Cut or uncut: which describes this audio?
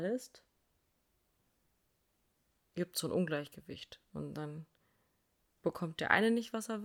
uncut